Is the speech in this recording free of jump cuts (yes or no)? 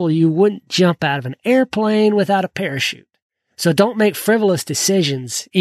yes